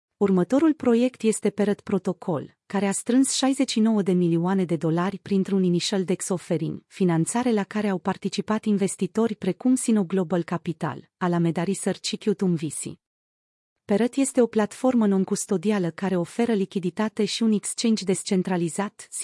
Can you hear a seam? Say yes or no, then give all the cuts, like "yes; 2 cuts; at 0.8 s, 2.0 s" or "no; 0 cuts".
no; 0 cuts